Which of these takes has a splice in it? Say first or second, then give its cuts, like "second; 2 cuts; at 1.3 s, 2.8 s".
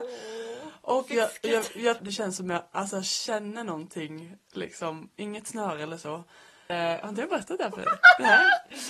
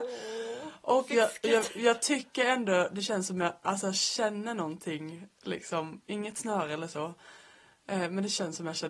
first; 2 cuts; at 2.0 s, 6.7 s